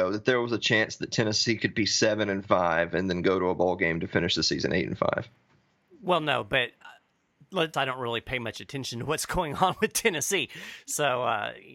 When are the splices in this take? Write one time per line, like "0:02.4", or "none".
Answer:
0:07.7